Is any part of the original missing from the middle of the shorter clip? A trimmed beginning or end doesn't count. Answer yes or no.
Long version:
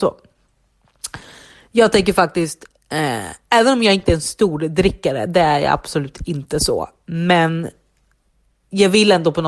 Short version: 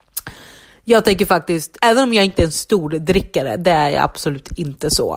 yes